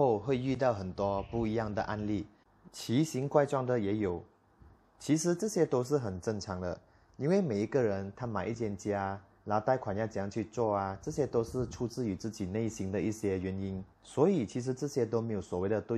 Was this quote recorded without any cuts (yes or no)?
no